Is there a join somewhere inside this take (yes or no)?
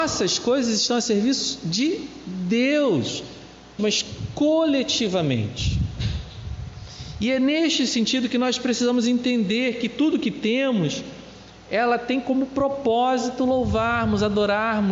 yes